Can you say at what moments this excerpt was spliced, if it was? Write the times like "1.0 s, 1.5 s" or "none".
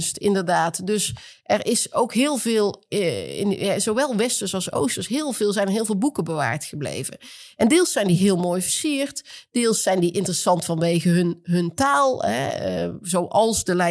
none